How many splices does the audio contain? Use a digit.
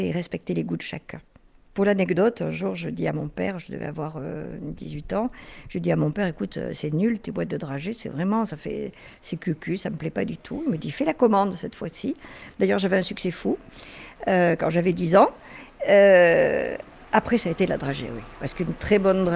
1